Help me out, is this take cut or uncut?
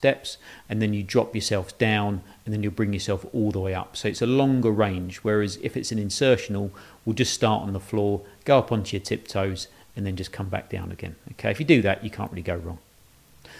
uncut